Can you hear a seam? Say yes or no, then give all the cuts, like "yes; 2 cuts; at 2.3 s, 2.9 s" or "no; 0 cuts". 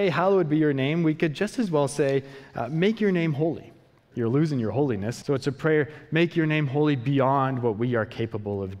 yes; 2 cuts; at 4.1 s, 5.2 s